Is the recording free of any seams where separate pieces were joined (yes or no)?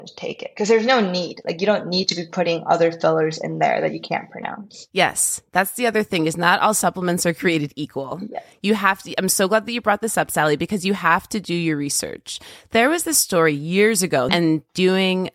no